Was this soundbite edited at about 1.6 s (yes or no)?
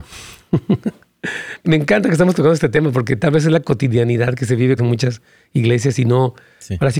yes